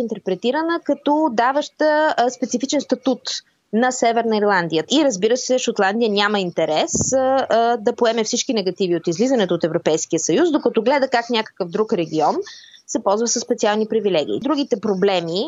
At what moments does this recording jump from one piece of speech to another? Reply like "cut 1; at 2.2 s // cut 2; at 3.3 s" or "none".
cut 1; at 4.9 s